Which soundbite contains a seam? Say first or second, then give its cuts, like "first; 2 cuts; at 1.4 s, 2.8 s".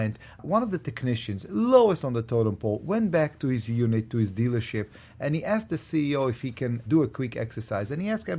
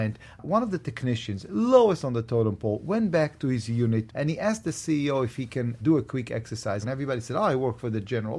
second; 2 cuts; at 4.1 s, 6.8 s